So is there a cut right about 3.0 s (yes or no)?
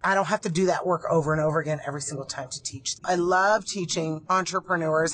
yes